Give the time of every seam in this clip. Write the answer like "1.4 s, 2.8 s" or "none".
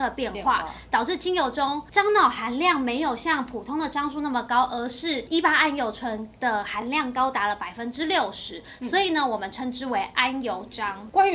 none